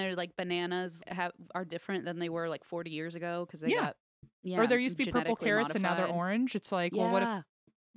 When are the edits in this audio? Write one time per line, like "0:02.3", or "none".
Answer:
0:01.0